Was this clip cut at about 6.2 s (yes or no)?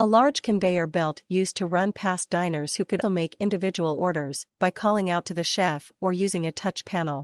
no